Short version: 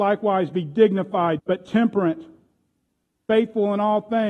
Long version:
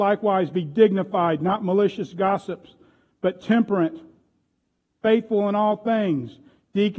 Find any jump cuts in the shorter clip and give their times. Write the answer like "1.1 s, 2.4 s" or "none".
1.4 s